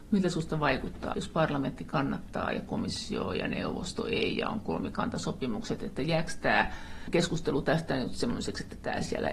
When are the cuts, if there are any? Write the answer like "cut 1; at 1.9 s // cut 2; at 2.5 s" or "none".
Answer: cut 1; at 1.1 s